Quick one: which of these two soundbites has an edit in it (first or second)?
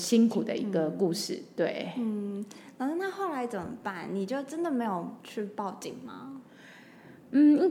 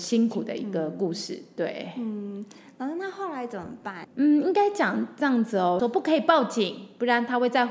second